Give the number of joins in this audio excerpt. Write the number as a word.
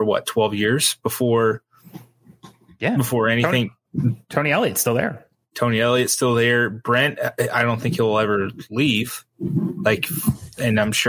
zero